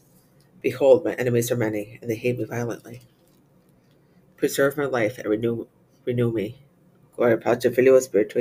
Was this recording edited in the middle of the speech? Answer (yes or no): yes